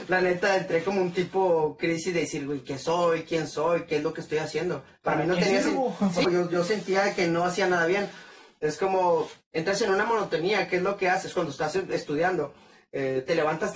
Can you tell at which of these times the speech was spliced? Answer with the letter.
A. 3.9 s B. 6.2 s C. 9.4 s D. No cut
B